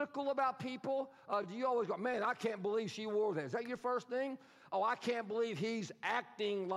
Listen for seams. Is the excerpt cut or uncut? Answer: uncut